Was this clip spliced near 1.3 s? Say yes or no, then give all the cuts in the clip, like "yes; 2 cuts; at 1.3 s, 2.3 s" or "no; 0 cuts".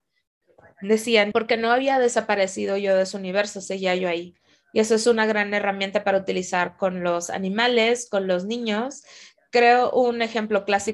yes; 1 cut; at 1.3 s